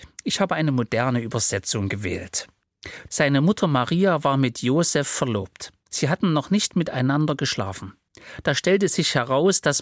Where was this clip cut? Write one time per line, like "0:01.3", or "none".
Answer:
0:03.1